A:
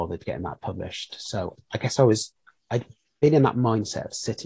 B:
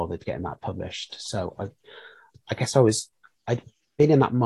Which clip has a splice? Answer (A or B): A